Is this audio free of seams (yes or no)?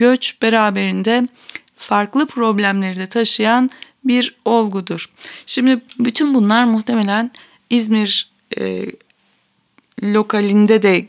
yes